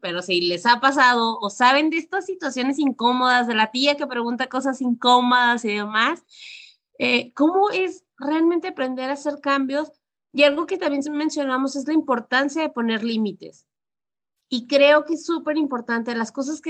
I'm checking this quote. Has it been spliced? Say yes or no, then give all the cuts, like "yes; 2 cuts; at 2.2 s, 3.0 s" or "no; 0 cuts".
no; 0 cuts